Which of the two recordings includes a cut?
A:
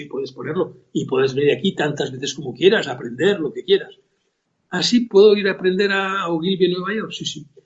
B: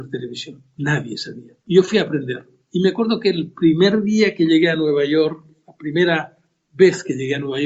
B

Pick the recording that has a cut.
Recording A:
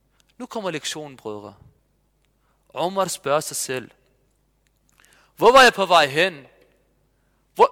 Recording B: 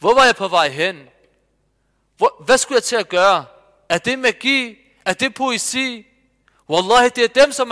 B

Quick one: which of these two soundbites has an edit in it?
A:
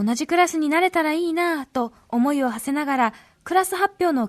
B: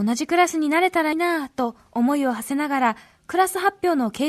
B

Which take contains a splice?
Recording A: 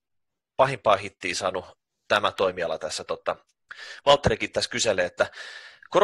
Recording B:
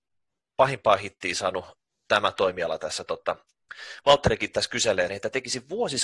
B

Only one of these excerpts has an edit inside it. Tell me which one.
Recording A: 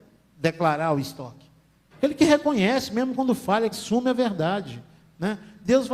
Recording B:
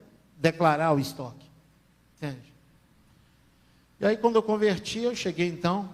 A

